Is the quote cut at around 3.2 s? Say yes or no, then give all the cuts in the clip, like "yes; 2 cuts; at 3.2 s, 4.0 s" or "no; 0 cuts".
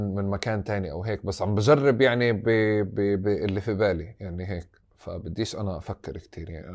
yes; 1 cut; at 3.2 s